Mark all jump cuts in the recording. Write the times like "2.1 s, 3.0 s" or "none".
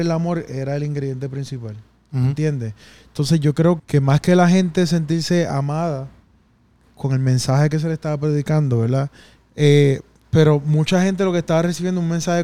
3.8 s, 9.4 s